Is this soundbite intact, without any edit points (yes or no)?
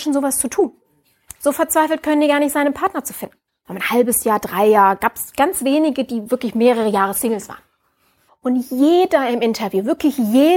no